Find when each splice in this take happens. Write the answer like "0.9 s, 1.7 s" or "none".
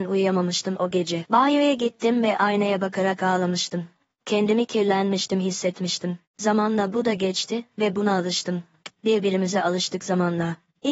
6.3 s, 9.0 s